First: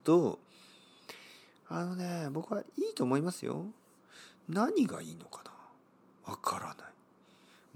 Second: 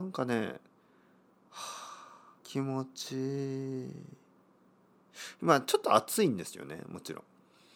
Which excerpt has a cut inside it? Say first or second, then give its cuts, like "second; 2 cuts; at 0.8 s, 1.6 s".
second; 1 cut; at 2.4 s